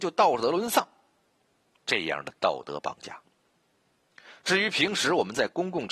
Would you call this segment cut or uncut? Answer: uncut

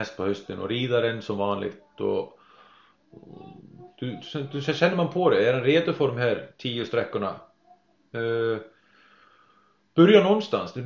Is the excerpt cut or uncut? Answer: uncut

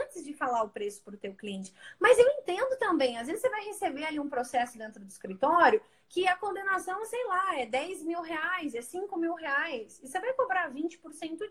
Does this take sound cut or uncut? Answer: uncut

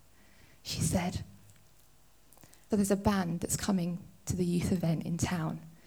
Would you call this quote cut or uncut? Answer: cut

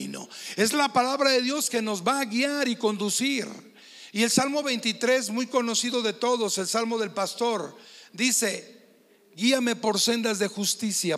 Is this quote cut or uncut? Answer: uncut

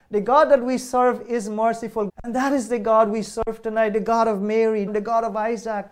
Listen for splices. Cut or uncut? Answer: cut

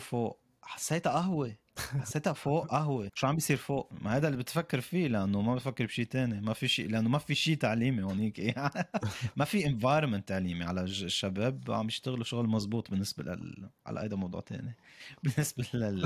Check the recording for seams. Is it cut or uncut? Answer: uncut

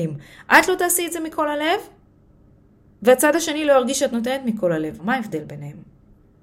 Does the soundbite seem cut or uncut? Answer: cut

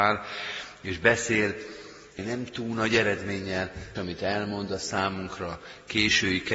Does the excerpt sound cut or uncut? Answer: cut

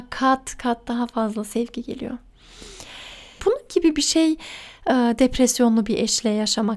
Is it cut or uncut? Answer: cut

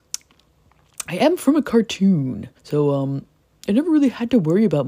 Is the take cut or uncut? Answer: cut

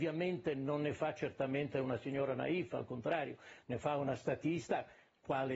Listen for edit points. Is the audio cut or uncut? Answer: uncut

